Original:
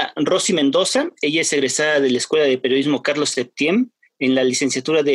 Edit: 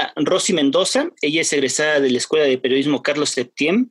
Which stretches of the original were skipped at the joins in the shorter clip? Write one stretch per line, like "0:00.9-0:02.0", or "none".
none